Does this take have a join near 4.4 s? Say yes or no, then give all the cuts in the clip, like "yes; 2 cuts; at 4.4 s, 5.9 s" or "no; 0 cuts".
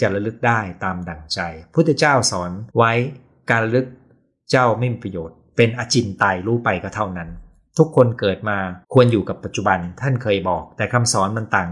no; 2 cuts; at 2.7 s, 8.8 s